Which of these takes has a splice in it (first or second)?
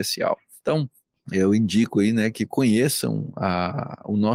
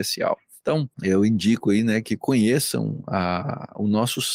second